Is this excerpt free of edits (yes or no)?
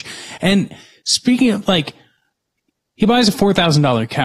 yes